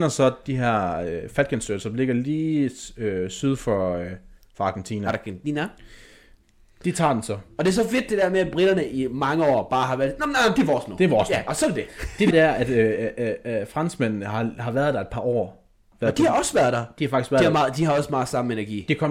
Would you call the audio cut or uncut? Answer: cut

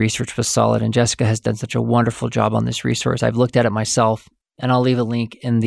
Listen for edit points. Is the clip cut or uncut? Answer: uncut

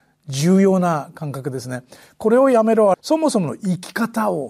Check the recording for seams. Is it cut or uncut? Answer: cut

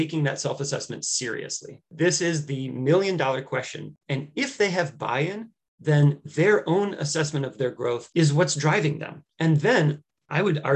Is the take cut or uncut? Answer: cut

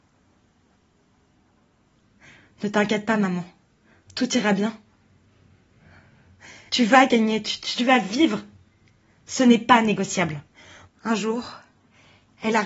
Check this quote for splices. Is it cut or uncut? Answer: cut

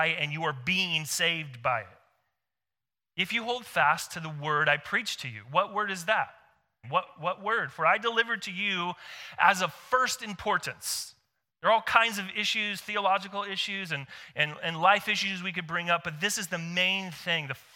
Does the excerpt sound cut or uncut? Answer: cut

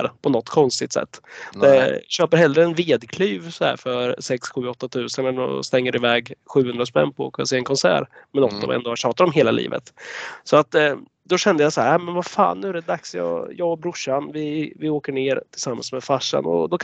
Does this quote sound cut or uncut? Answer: uncut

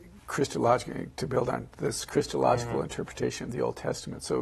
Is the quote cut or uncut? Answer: uncut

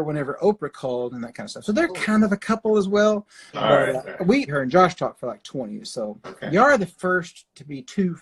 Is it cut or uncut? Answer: cut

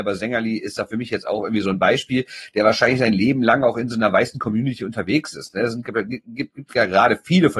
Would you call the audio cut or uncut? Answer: uncut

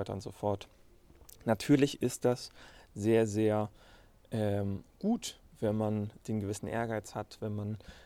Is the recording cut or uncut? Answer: uncut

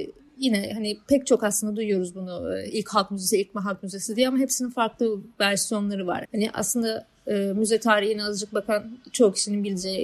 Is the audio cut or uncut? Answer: cut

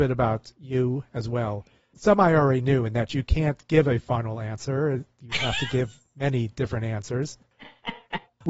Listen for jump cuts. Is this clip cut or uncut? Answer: uncut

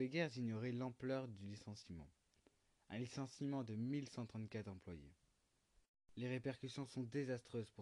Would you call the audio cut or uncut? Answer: uncut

